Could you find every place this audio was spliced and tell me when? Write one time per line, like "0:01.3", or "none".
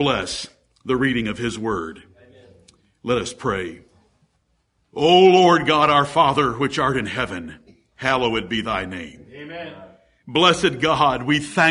none